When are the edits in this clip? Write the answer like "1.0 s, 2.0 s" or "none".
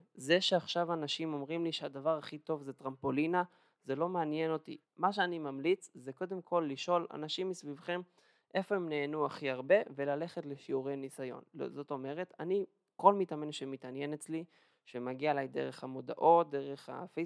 4.8 s